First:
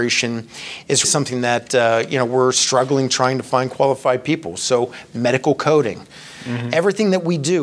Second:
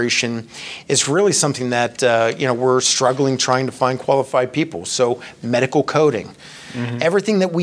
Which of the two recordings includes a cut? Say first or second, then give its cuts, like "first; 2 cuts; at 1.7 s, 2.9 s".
first; 1 cut; at 1.0 s